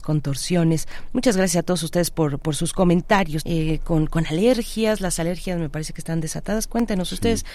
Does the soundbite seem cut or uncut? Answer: cut